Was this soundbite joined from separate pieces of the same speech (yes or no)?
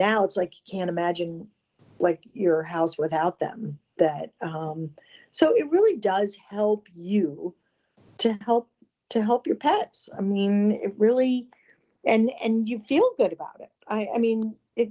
no